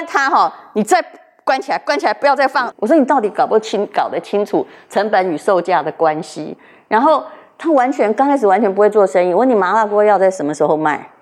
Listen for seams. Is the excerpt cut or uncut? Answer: cut